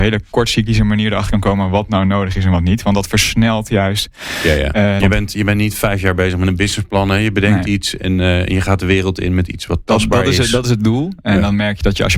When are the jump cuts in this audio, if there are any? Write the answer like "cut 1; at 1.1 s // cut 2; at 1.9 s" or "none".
cut 1; at 5.0 s